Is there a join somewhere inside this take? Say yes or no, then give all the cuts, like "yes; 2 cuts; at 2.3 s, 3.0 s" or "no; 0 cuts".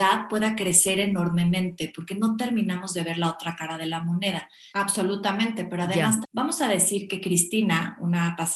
yes; 2 cuts; at 4.7 s, 6.2 s